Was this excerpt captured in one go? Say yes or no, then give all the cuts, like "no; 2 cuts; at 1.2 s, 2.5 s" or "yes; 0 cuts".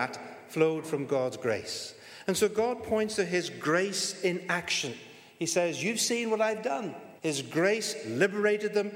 no; 1 cut; at 7.2 s